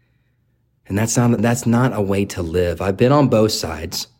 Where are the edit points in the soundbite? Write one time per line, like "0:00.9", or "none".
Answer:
0:01.4

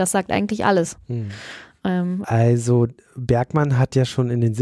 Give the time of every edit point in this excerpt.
0:02.2

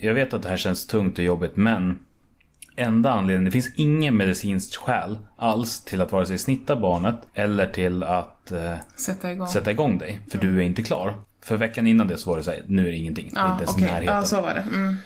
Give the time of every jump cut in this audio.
0:07.3
0:11.2

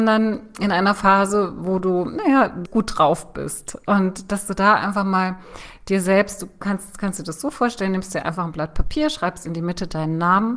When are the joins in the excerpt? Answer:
0:02.7

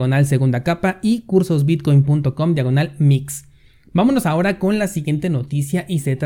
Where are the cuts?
none

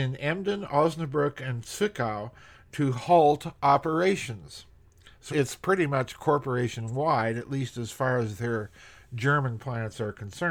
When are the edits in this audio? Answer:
0:05.3

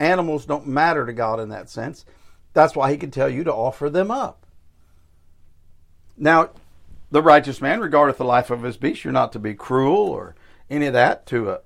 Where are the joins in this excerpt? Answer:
none

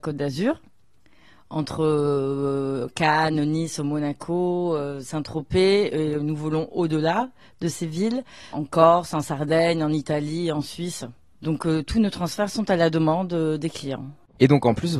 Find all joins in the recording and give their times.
0:08.5

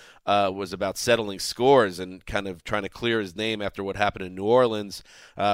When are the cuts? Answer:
none

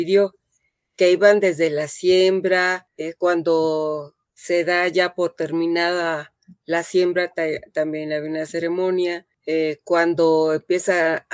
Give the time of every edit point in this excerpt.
none

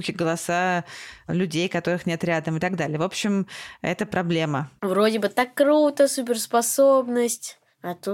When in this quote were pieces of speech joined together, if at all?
0:04.8

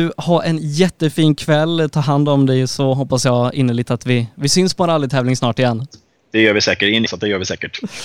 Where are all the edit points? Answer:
0:07.1

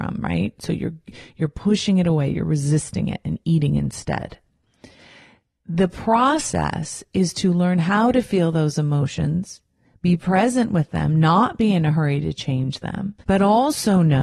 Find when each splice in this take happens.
0:13.2

